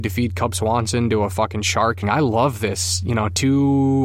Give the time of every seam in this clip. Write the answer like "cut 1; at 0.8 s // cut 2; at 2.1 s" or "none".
cut 1; at 2.0 s